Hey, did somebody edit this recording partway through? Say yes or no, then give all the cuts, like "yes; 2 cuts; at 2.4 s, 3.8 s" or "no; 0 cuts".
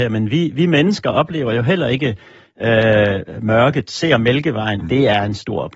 yes; 1 cut; at 4.8 s